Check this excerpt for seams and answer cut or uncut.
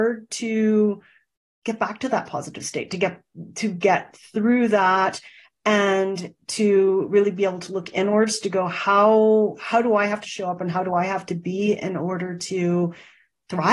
uncut